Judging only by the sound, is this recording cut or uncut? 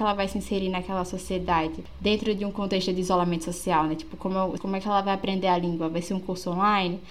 cut